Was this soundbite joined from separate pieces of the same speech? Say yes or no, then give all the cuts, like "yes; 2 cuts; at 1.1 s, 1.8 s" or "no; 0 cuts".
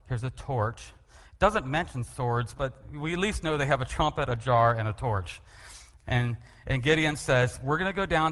yes; 1 cut; at 2.5 s